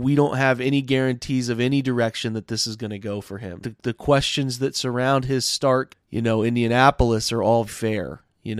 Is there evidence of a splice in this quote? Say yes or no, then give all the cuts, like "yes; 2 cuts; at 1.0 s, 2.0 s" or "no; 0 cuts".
yes; 3 cuts; at 3.6 s, 5.9 s, 7.7 s